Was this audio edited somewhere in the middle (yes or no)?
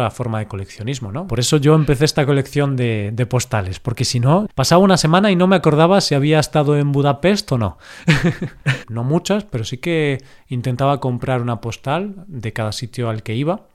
yes